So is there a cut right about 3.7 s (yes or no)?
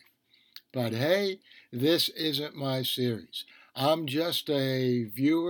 no